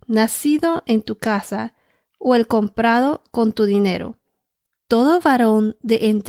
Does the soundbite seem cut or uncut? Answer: cut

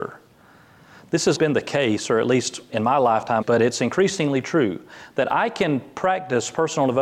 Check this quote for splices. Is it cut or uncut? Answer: cut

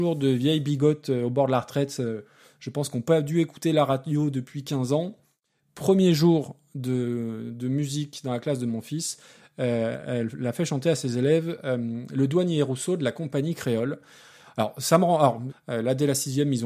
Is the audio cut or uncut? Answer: cut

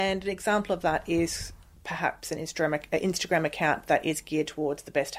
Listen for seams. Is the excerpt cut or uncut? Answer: uncut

